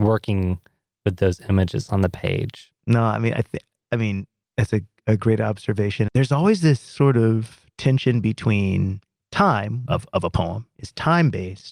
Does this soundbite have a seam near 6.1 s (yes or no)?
yes